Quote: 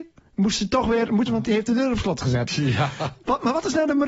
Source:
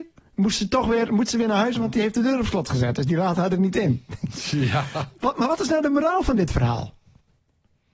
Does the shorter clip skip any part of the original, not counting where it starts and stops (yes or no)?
yes